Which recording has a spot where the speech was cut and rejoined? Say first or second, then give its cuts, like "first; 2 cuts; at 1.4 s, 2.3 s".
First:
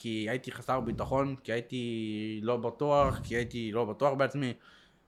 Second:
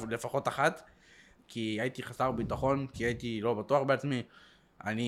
second; 2 cuts; at 1.4 s, 2.9 s